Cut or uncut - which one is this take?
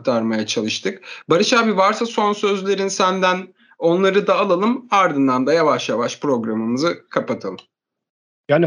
uncut